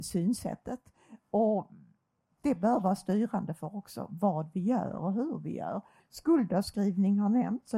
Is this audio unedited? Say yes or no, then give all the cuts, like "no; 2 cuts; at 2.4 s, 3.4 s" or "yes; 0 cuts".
no; 1 cut; at 6.0 s